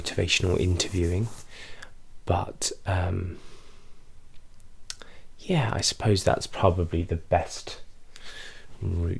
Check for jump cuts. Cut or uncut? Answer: uncut